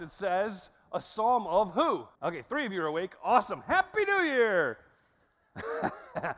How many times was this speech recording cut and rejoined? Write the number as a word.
one